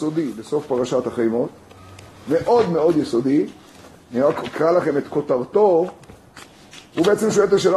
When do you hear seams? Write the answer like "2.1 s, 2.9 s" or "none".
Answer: none